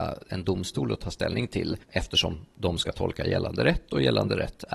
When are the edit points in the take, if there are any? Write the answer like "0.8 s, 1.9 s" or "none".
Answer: 1.8 s